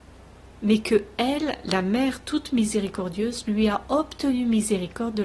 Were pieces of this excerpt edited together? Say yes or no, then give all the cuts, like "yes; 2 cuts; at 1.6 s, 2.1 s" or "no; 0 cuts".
no; 0 cuts